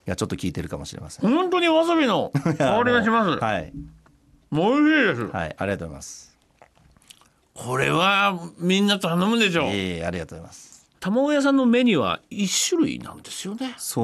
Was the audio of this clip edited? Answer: no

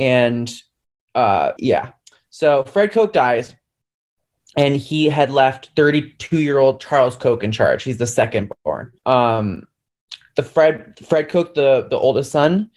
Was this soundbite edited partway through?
yes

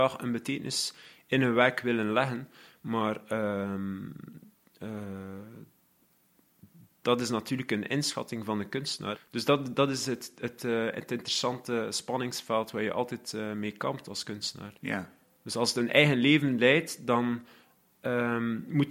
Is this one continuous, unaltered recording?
no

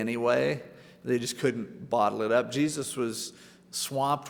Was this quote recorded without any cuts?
yes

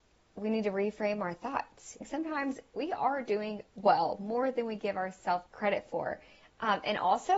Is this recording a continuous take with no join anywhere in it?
no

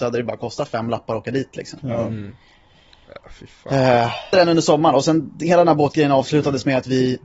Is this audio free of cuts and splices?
no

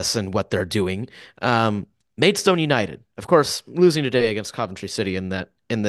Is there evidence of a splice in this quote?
no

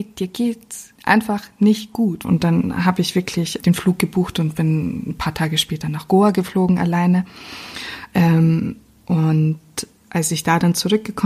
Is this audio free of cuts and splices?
no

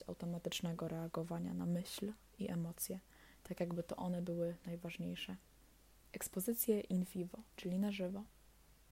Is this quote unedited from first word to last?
no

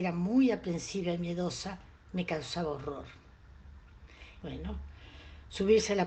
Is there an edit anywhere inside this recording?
yes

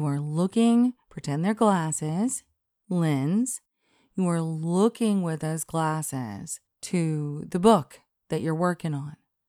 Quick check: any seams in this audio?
no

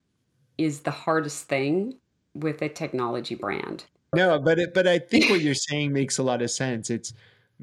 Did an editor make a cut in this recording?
yes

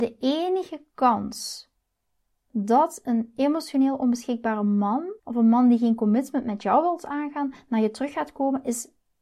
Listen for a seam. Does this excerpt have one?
yes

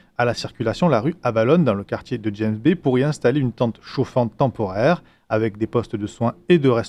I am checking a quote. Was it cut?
no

